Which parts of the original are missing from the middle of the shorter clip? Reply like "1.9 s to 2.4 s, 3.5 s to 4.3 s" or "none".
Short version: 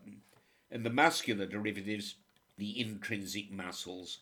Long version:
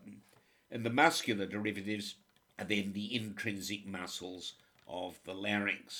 2.6 s to 2.9 s

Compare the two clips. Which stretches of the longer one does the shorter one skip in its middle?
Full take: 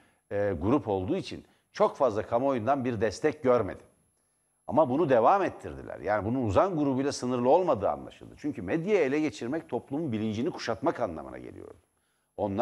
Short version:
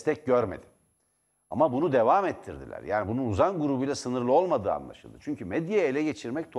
none

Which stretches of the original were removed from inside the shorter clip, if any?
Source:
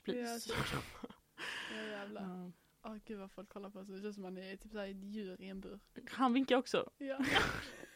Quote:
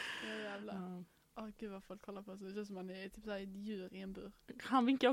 none

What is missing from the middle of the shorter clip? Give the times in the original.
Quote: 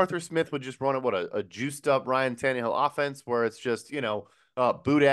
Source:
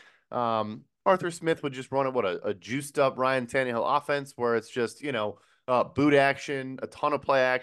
none

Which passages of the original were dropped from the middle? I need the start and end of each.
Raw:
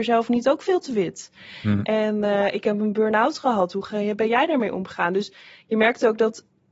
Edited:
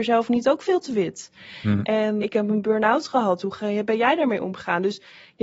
2.2 s to 2.5 s

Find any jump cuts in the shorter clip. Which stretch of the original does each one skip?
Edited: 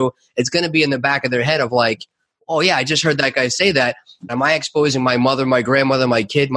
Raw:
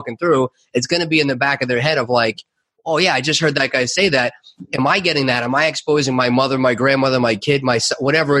4.7 s to 5.4 s

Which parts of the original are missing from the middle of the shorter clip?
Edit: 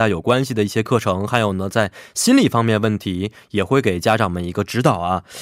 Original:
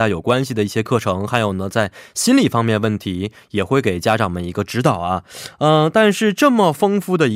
none

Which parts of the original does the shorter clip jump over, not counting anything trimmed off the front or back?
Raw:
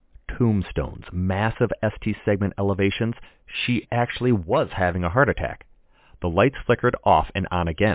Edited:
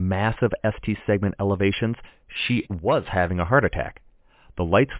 3.9 s to 4.3 s

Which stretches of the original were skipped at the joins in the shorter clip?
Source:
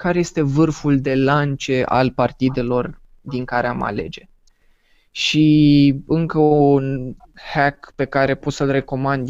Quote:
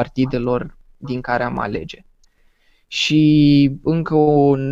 none

